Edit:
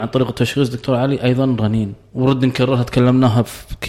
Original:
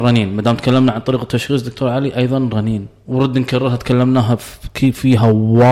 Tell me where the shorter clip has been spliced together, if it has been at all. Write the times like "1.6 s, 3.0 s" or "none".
none